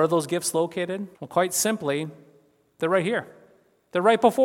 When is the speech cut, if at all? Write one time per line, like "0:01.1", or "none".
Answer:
0:01.2